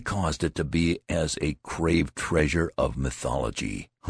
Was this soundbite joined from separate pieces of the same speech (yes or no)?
no